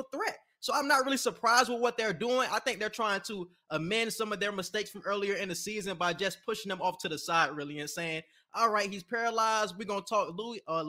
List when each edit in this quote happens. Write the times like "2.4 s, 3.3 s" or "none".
none